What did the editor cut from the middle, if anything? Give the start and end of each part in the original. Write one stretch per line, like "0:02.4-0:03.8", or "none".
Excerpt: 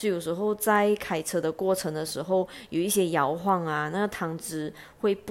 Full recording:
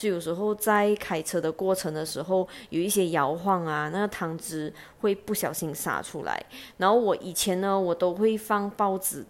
none